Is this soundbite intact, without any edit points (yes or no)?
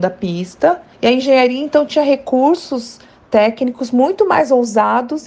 yes